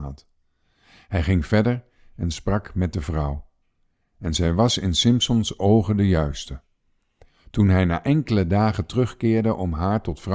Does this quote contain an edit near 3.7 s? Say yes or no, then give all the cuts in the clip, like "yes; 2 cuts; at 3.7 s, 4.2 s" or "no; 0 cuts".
no; 0 cuts